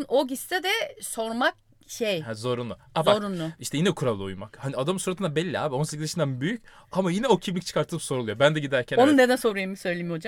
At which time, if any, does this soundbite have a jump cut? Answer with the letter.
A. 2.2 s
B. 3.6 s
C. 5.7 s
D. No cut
D